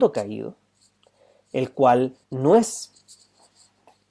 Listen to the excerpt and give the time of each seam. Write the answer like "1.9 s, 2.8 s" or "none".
2.2 s